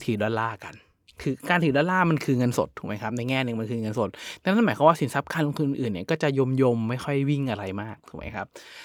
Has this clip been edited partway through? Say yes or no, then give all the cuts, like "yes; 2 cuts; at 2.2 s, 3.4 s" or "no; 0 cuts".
no; 0 cuts